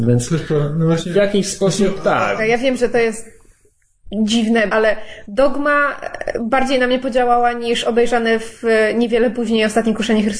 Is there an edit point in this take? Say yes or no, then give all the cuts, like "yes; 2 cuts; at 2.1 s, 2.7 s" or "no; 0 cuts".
yes; 2 cuts; at 2.4 s, 4.7 s